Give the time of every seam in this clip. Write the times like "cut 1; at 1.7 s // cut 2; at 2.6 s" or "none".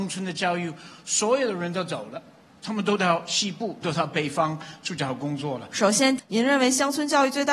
cut 1; at 3.8 s // cut 2; at 5.7 s